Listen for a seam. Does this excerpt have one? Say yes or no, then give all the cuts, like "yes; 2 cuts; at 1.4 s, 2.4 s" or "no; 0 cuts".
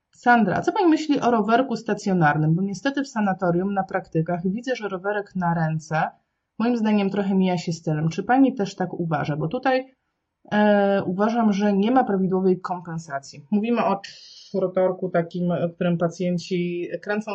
no; 0 cuts